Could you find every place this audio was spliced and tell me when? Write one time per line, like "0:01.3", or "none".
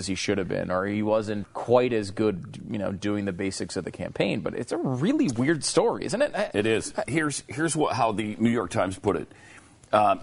0:01.4
0:07.0

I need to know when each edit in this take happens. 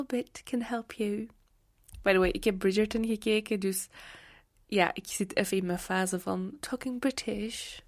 none

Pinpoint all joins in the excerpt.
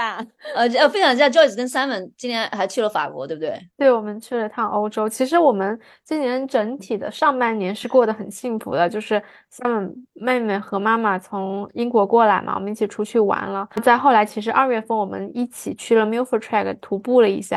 none

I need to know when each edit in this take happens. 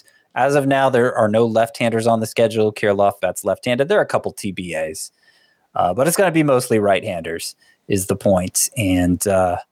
0:03.2

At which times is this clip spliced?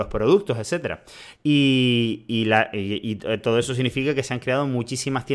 0:01.3

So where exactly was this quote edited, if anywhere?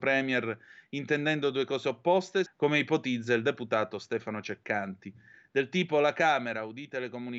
0:02.5

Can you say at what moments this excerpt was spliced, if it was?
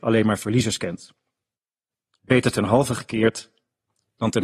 none

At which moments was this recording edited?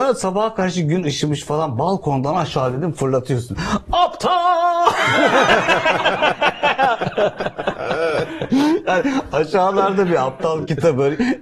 none

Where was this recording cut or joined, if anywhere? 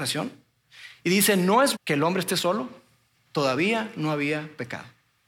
0:01.7

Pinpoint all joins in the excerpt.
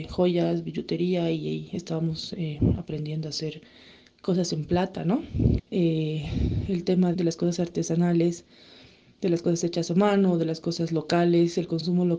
0:05.6
0:07.1

